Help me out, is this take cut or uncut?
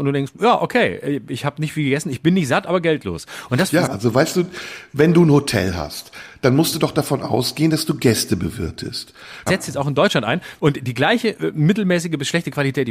cut